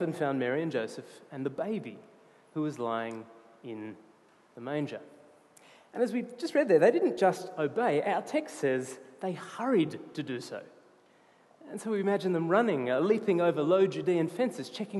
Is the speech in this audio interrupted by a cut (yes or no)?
no